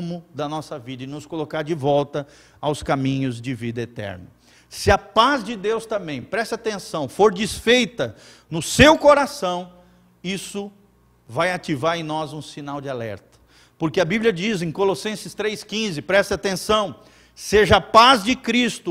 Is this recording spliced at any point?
no; 0 cuts

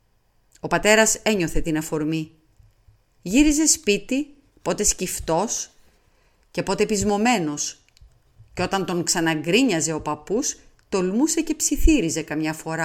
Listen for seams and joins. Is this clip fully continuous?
yes; 0 cuts

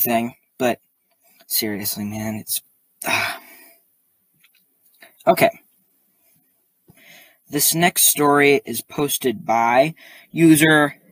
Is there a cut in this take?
no; 0 cuts

